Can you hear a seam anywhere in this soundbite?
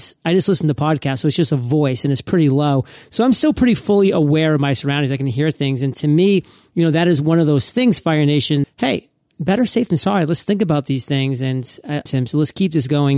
yes; 2 cuts; at 8.6 s, 12.1 s

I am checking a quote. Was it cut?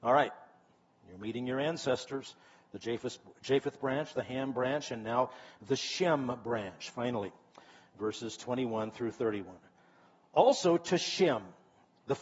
no; 0 cuts

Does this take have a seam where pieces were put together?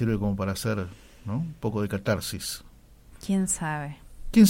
no; 0 cuts

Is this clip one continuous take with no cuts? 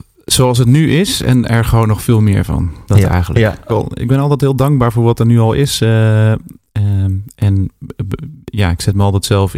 no; 1 cut; at 3.7 s

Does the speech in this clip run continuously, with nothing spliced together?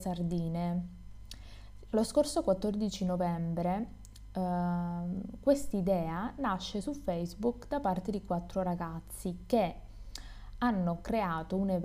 no; 1 cut; at 1.9 s

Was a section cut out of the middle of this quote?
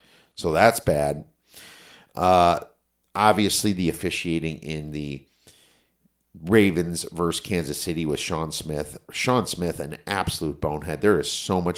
no; 0 cuts

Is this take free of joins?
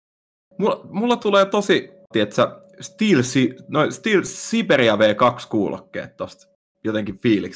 no; 1 cut; at 2.1 s

